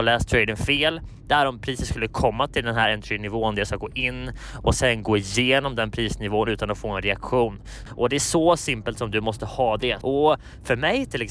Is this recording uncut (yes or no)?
no